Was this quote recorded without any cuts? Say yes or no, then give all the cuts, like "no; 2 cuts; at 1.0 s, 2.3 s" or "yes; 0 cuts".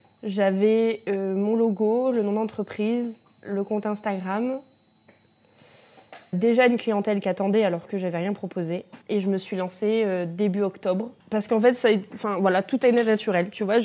no; 2 cuts; at 6.3 s, 11.2 s